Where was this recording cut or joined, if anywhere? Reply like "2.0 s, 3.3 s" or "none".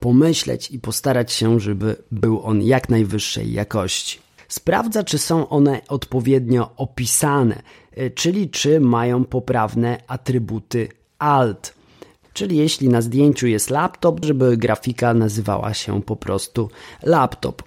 4.4 s, 12.2 s, 14.2 s